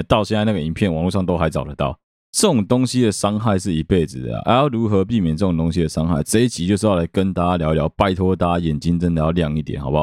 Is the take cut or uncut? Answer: uncut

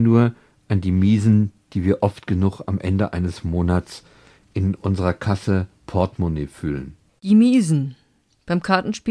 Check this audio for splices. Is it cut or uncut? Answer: cut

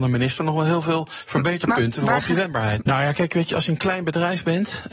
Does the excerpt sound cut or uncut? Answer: cut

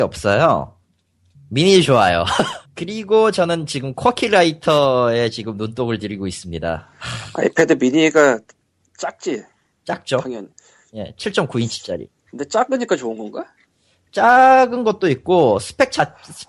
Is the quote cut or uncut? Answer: cut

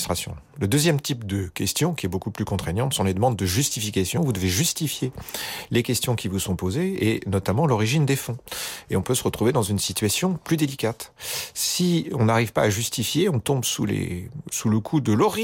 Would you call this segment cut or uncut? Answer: uncut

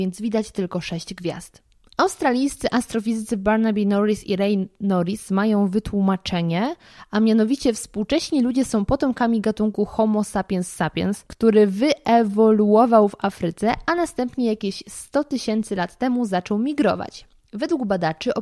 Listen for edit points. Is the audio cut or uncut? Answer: cut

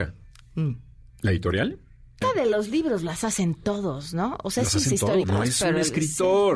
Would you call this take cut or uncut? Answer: cut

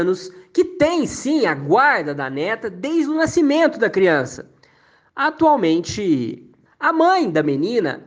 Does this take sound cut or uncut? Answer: cut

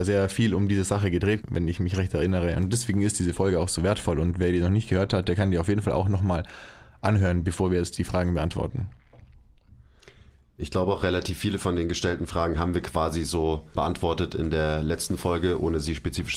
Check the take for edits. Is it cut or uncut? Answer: cut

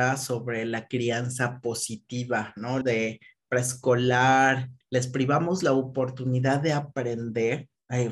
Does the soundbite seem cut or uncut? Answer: cut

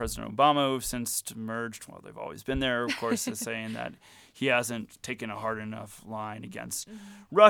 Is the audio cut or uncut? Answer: uncut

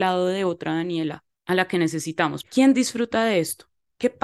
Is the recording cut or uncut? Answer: cut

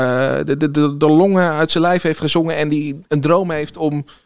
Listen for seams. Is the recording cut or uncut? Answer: uncut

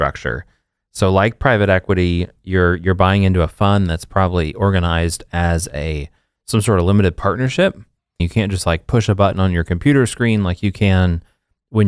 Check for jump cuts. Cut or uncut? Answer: cut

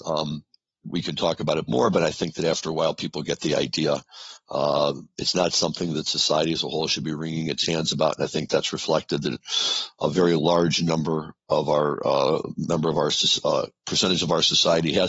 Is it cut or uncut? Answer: uncut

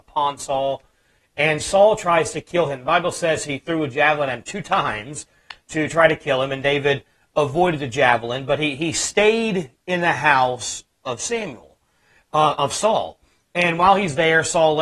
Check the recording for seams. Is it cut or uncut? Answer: uncut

